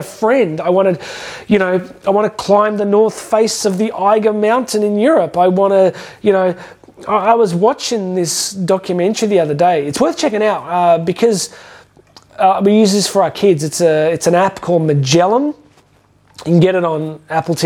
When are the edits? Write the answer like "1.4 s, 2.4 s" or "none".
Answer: none